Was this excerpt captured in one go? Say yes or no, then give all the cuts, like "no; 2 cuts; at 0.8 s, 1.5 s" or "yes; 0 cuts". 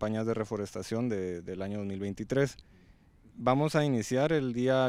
yes; 0 cuts